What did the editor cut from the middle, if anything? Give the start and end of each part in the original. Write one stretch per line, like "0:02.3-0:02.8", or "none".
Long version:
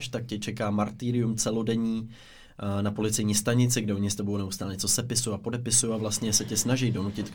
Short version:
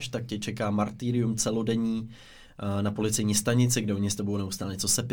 none